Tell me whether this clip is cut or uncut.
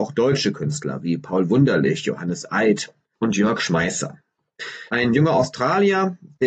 cut